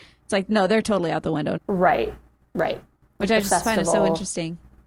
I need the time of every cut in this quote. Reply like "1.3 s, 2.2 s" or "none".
1.6 s